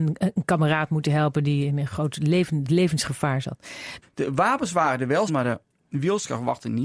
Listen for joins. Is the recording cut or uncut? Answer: cut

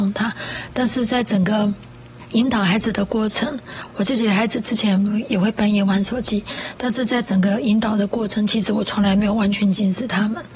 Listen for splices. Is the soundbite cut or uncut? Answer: uncut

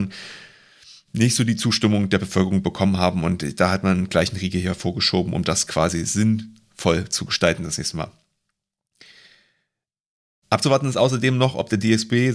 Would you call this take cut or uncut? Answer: uncut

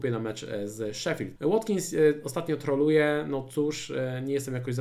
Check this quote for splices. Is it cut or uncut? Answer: cut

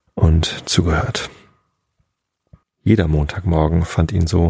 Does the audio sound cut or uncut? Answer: cut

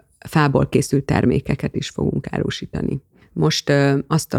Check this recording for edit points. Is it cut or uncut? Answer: cut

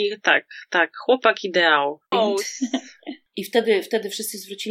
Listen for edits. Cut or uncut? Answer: cut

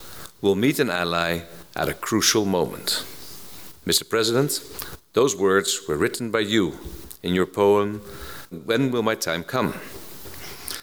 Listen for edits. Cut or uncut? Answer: cut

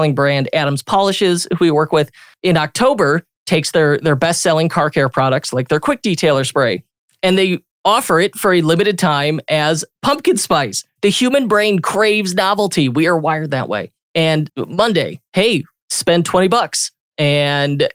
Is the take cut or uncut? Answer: cut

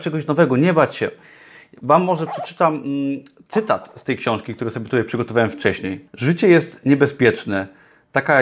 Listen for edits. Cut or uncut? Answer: cut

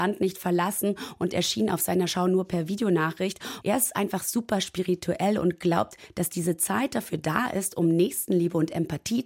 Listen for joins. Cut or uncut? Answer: cut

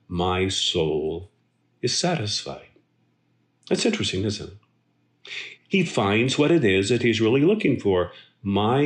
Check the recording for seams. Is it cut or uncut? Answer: cut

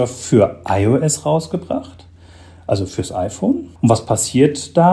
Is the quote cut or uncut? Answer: cut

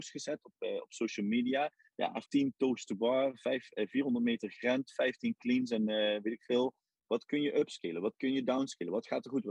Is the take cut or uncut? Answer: cut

